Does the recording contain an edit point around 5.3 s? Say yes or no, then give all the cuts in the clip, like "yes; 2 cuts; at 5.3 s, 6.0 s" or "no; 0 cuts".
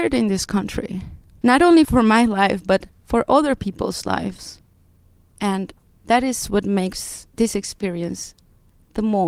yes; 1 cut; at 5.3 s